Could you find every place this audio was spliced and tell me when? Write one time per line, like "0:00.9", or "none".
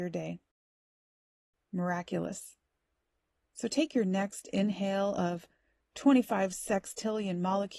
0:01.5
0:03.4